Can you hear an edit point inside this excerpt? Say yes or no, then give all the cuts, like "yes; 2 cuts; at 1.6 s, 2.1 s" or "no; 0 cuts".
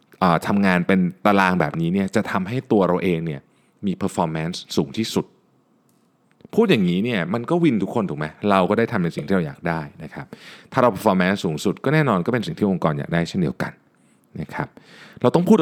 no; 0 cuts